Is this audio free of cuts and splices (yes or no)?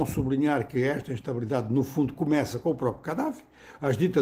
yes